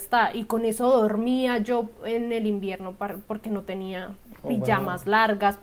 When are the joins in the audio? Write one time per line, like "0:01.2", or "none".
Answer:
none